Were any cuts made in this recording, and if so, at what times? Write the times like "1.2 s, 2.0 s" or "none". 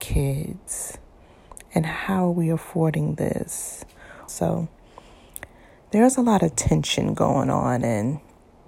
4.3 s